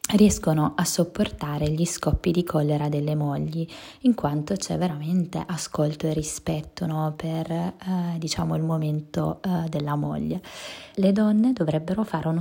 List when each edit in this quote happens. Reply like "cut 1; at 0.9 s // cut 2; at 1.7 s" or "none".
cut 1; at 10.9 s